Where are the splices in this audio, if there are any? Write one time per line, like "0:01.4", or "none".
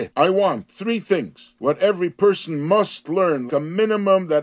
0:01.6
0:03.5